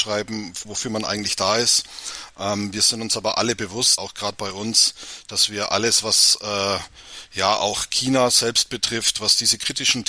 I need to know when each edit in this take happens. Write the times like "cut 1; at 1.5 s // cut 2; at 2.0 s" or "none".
cut 1; at 4.0 s